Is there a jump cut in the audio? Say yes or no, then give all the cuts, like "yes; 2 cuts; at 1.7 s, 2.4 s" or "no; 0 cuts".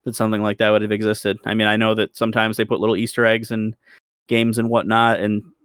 no; 0 cuts